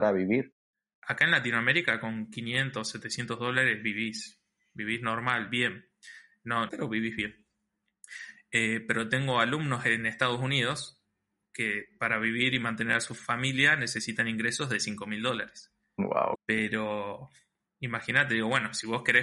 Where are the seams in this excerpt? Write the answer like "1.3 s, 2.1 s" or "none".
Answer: 6.7 s, 16.3 s